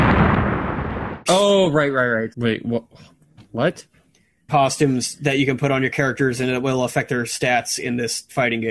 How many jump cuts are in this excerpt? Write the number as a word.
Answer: three